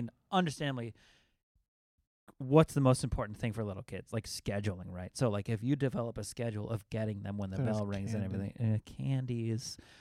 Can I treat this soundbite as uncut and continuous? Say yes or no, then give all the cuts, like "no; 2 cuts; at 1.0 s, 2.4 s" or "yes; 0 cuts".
yes; 0 cuts